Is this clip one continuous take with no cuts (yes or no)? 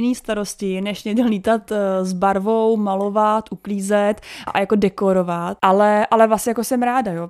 no